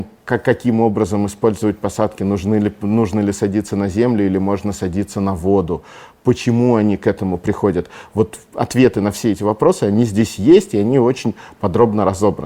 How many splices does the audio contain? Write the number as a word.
zero